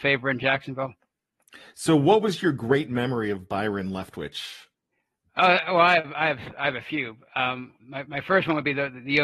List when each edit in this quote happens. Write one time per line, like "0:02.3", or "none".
none